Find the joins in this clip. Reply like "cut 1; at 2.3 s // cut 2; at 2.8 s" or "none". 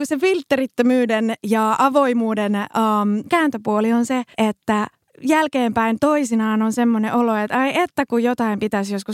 cut 1; at 4.3 s